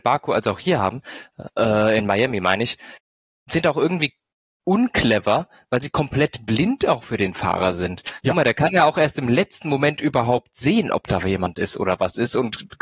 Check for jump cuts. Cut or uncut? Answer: uncut